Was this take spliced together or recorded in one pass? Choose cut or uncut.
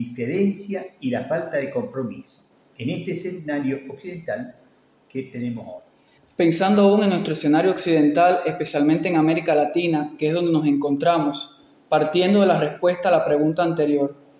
uncut